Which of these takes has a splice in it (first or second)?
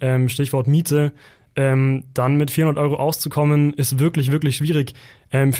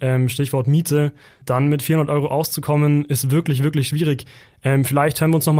second